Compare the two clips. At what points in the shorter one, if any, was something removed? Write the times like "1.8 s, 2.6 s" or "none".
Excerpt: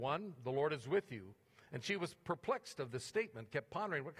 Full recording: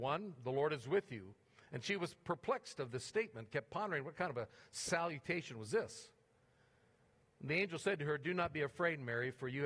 none